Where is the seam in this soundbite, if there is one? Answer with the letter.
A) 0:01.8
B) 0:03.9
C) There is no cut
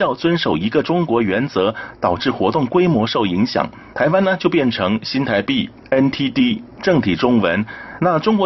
B